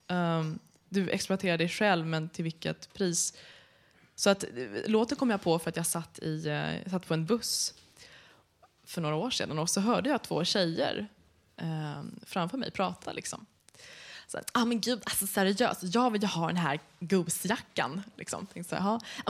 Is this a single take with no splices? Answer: yes; 0 cuts

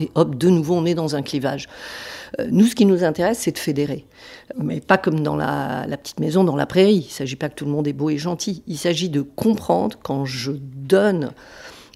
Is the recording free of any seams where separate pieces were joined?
no; 1 cut; at 4.5 s

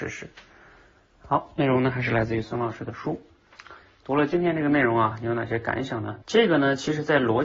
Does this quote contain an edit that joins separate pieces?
yes; 1 cut; at 6.2 s

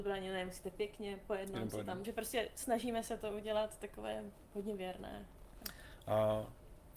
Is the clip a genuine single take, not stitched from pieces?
no; 1 cut; at 2.0 s

